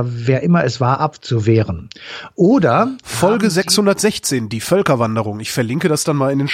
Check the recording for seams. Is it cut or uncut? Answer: uncut